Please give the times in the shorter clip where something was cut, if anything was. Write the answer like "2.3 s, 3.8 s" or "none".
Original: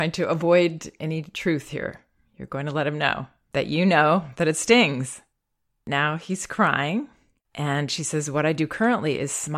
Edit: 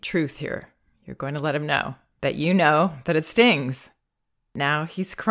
none